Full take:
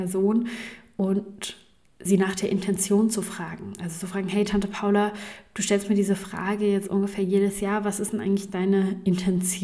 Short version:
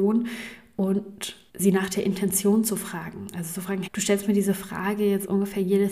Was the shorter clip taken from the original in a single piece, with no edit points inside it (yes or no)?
no